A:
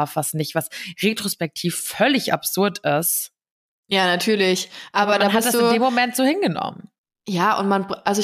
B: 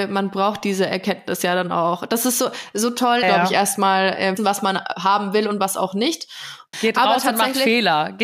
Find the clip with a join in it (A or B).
B